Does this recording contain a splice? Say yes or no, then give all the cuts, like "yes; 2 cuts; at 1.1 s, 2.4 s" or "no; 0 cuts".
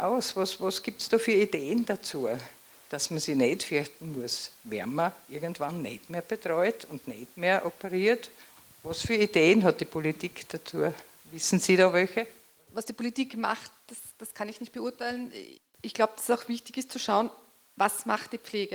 yes; 1 cut; at 12.7 s